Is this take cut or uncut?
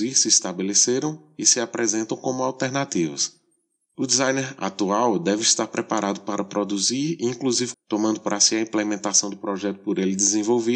cut